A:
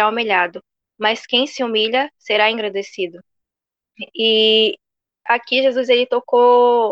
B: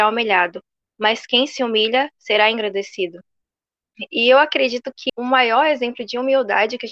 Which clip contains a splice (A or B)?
B